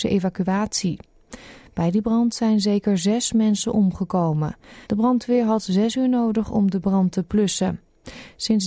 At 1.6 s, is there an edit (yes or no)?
no